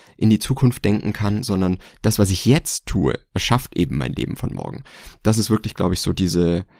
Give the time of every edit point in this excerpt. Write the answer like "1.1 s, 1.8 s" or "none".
none